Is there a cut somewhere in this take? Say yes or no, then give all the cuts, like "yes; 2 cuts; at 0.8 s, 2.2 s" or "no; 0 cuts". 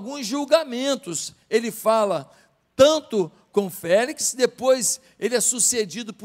no; 0 cuts